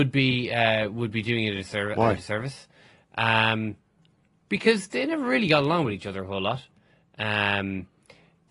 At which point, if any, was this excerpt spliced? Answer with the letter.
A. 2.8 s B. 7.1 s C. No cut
C